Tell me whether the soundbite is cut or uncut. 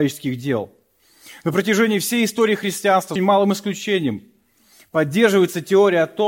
cut